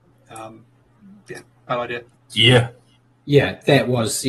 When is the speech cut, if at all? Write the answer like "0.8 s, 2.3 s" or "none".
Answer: 2.1 s